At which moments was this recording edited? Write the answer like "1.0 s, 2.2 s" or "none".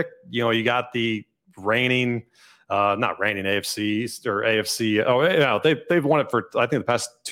none